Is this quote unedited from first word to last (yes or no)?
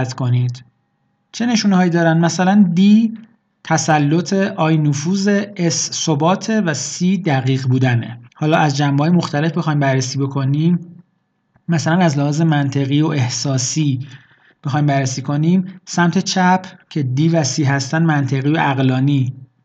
no